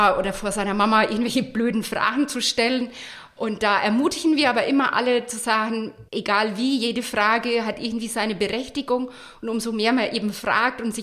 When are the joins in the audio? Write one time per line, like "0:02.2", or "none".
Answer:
0:06.1